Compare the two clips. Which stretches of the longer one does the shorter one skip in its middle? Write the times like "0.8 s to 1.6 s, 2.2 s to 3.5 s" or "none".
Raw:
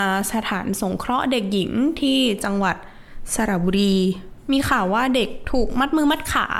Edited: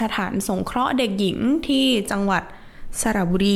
none